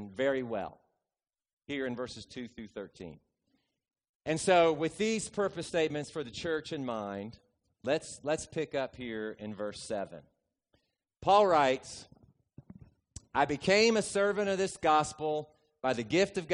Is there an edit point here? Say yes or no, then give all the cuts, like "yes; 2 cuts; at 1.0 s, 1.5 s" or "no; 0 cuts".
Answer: no; 0 cuts